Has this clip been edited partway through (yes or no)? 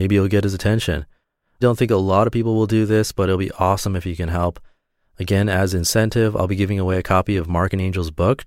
yes